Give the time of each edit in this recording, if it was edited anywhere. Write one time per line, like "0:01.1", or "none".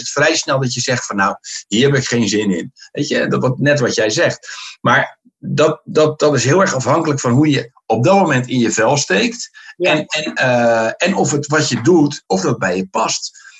0:10.4
0:12.3